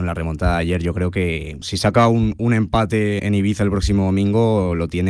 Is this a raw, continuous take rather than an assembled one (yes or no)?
no